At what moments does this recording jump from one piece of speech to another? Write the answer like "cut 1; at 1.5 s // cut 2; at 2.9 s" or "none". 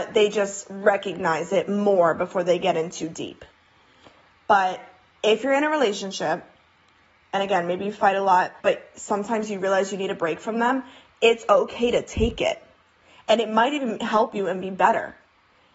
cut 1; at 8.6 s